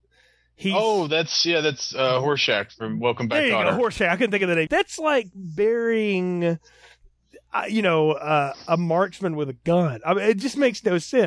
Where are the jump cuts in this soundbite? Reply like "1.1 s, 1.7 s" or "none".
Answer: 4.7 s